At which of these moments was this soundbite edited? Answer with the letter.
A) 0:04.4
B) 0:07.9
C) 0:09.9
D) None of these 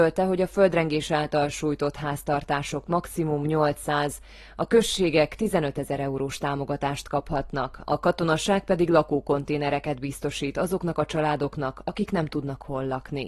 D